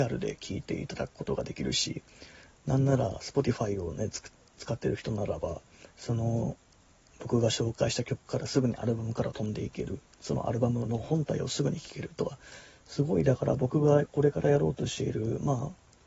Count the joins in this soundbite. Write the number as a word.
one